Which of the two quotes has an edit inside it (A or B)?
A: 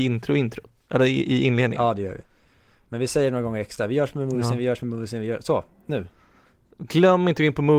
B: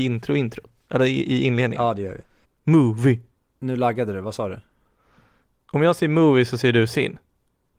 B